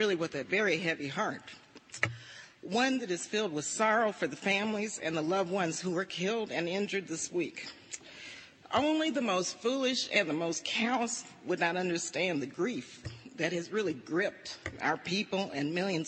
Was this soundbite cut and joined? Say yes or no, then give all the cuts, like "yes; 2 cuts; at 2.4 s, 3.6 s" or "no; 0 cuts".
no; 0 cuts